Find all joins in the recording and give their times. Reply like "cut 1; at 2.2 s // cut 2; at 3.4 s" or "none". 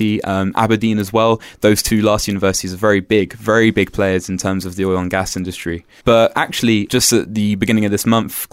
cut 1; at 6.0 s